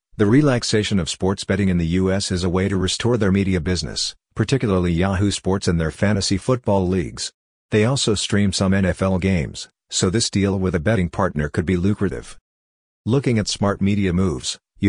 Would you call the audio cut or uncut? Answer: uncut